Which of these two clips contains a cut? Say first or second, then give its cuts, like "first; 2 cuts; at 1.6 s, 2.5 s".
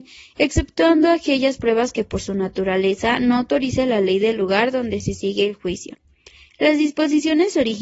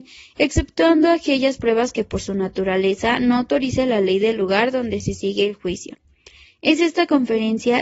second; 1 cut; at 6.5 s